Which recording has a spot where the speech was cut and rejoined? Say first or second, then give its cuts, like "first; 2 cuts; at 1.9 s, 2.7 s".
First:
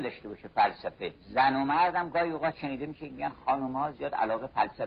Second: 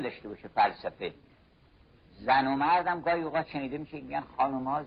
first; 1 cut; at 1.2 s